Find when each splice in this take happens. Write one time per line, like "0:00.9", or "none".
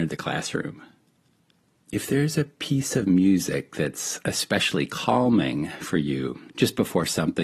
0:06.5